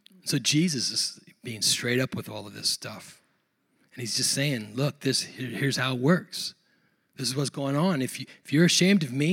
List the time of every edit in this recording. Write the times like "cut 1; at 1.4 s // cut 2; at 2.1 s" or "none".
none

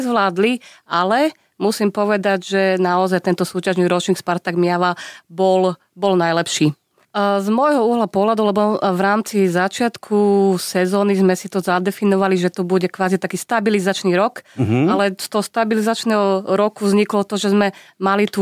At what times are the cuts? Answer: cut 1; at 7.0 s

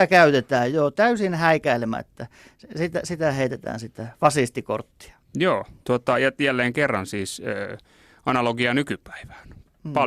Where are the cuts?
none

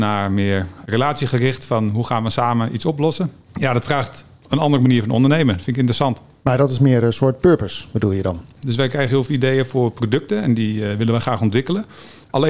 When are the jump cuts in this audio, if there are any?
cut 1; at 3.4 s // cut 2; at 8.5 s

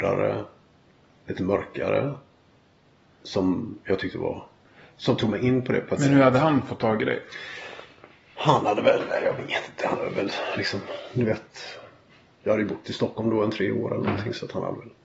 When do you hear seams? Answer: none

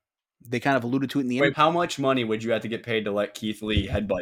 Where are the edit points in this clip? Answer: cut 1; at 1.5 s

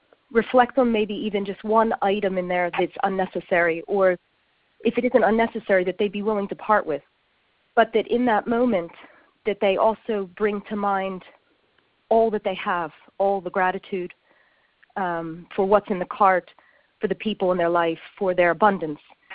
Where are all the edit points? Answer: none

